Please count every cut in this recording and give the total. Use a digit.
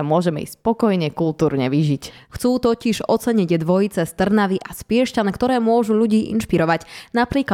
1